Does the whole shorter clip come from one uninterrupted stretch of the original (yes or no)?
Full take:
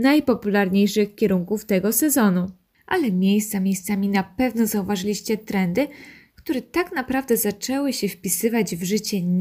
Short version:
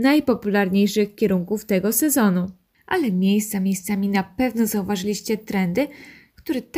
yes